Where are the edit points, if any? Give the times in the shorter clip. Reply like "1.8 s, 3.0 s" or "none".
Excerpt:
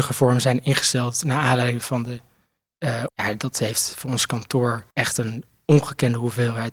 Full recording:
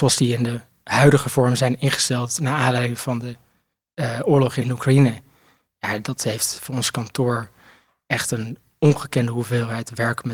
3.1 s, 4.9 s